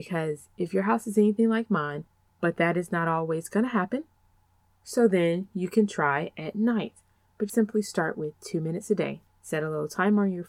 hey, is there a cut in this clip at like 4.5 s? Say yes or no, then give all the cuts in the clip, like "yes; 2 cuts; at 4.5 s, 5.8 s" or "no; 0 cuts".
no; 3 cuts; at 2.3 s, 7.5 s, 9.3 s